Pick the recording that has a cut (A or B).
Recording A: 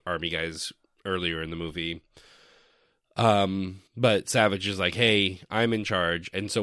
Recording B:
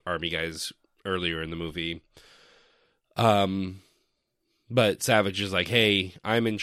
A